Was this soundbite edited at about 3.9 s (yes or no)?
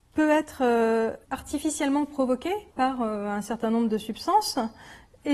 no